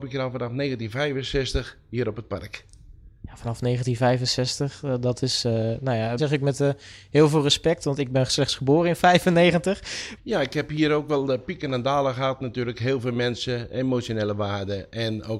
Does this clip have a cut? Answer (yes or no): yes